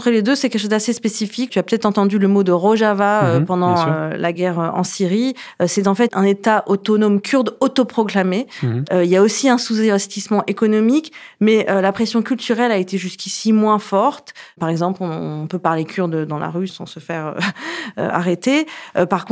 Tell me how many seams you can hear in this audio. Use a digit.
1